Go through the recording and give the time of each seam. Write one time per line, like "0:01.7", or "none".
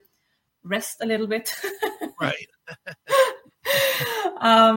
none